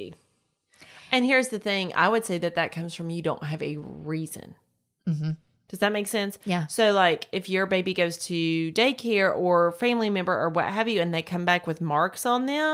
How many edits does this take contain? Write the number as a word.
zero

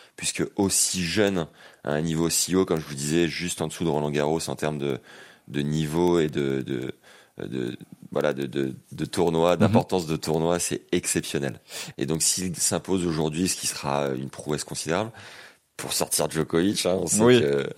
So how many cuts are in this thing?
one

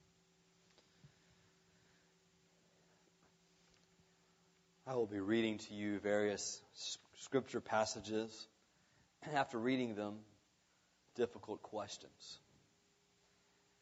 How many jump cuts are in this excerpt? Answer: one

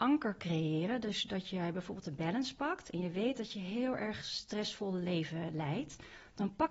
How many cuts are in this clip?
zero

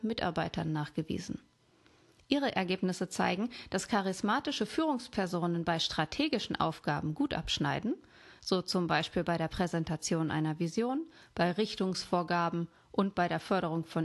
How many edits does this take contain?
zero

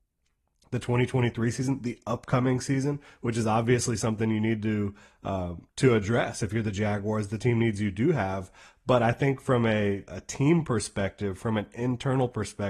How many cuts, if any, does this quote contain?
two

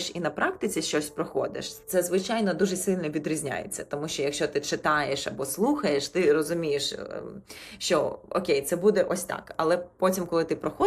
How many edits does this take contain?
zero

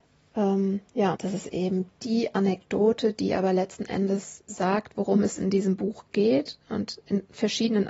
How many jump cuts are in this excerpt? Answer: one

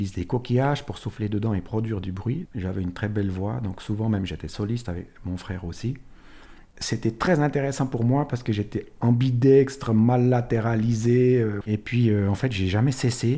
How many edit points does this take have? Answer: two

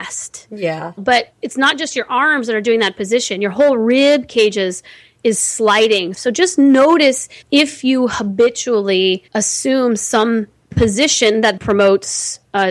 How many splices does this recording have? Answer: three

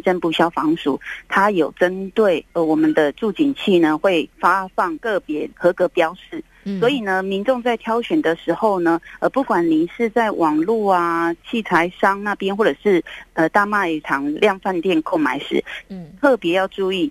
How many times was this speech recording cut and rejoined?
zero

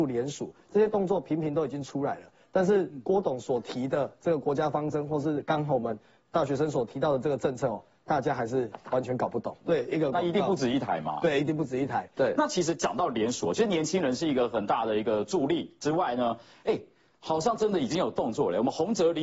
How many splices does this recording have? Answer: two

